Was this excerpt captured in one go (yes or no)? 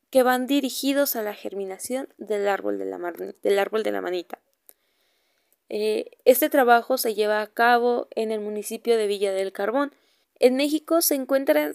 no